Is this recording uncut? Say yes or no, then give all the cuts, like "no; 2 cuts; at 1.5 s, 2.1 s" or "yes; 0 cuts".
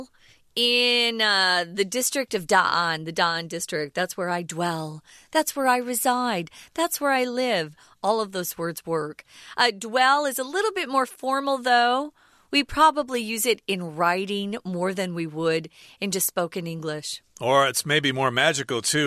yes; 0 cuts